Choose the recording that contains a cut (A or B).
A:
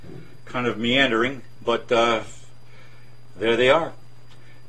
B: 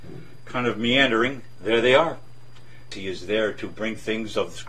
B